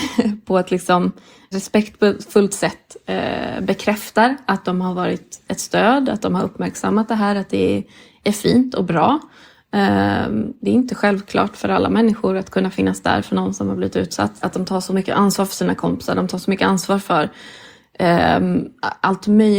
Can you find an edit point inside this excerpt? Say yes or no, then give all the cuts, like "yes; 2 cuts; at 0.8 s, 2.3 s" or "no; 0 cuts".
yes; 2 cuts; at 1.5 s, 14.4 s